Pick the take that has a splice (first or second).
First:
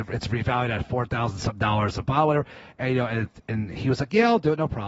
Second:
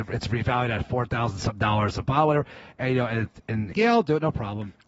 second